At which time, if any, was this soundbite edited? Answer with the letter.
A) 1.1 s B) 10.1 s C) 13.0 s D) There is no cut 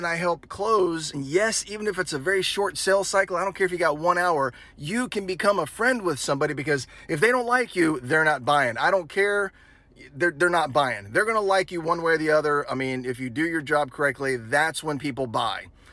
A